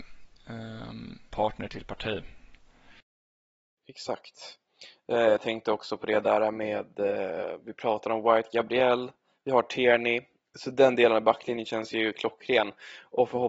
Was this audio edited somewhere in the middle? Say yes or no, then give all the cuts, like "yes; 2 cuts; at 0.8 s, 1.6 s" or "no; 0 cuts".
yes; 1 cut; at 1.3 s